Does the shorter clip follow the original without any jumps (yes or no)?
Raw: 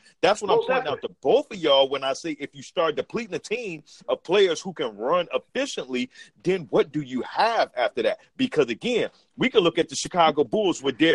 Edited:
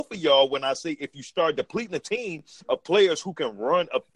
yes